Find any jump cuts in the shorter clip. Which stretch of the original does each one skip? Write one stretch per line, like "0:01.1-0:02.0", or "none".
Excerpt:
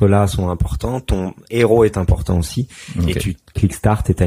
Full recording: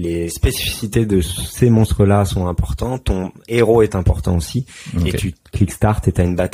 none